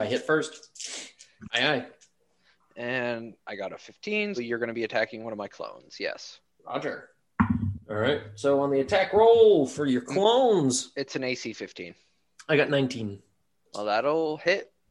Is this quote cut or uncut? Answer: cut